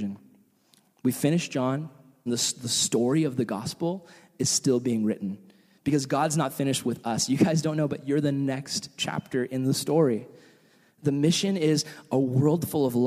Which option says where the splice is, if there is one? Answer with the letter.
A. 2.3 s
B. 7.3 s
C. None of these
A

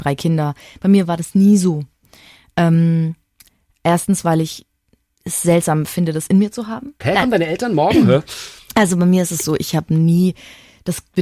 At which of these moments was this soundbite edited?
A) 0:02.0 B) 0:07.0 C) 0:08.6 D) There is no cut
B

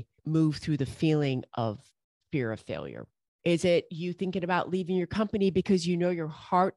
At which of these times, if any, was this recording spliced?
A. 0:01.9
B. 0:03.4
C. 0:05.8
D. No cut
B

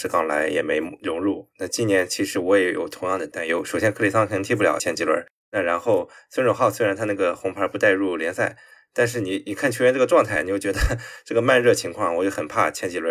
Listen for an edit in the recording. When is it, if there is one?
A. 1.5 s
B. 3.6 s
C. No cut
C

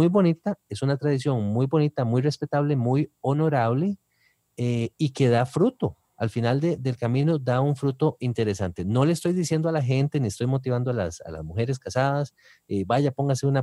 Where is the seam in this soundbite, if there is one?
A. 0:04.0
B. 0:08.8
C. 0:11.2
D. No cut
D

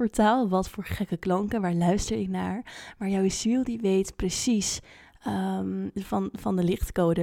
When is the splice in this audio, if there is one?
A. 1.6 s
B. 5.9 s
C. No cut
B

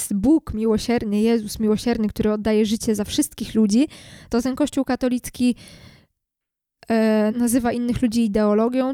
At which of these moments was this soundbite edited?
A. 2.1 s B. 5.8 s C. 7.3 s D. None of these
C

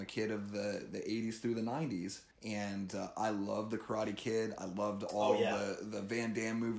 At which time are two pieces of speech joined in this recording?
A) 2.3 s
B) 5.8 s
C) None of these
A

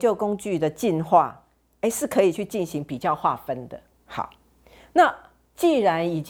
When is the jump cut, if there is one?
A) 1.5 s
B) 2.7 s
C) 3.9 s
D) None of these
D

